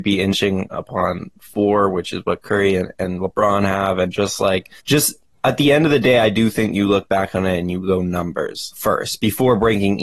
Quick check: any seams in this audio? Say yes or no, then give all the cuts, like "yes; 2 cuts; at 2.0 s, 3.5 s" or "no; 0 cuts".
yes; 2 cuts; at 4.8 s, 8.7 s